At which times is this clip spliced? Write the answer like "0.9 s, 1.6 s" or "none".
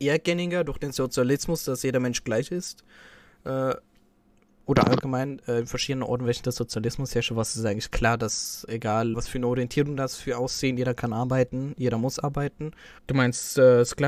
9.1 s, 13.0 s